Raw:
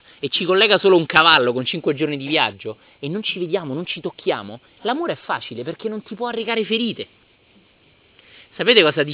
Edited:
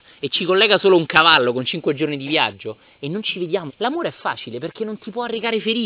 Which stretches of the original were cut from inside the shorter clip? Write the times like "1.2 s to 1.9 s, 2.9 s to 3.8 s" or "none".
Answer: 3.7 s to 4.7 s